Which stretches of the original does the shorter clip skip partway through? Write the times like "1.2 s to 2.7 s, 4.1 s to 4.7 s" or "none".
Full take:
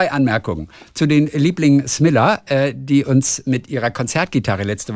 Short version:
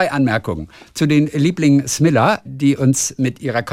2.4 s to 2.7 s